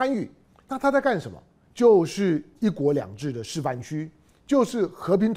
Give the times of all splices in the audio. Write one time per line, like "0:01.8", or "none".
0:01.7